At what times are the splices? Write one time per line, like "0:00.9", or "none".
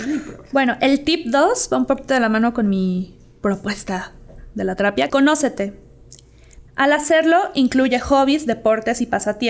0:05.1
0:06.7